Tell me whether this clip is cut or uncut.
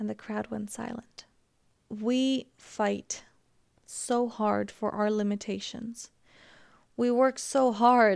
uncut